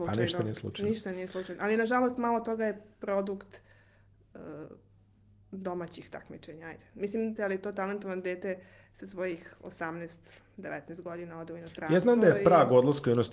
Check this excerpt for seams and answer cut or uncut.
cut